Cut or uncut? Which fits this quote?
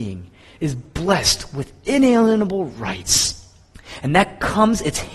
uncut